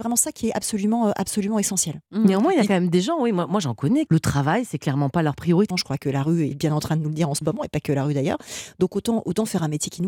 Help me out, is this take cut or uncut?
cut